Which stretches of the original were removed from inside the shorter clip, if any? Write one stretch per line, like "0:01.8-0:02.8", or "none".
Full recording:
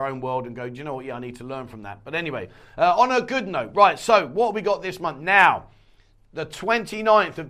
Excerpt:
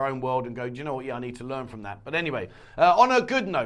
none